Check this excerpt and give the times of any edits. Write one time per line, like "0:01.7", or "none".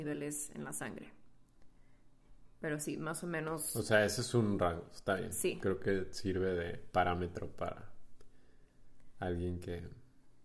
none